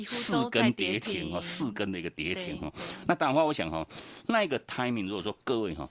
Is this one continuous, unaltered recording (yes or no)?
yes